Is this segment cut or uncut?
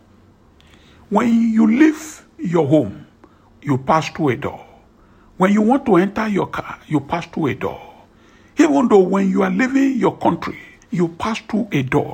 cut